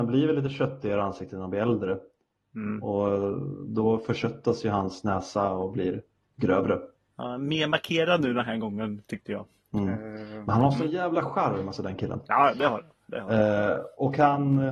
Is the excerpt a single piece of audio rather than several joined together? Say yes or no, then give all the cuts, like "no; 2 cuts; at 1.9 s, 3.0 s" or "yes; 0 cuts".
yes; 0 cuts